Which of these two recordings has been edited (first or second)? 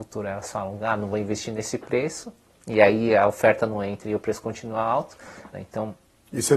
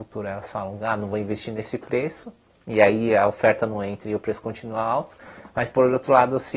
first